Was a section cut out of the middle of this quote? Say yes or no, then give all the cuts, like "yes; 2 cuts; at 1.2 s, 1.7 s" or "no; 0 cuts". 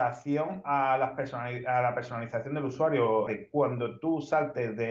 yes; 1 cut; at 3.3 s